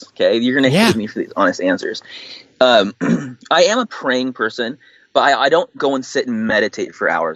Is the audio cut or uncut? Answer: uncut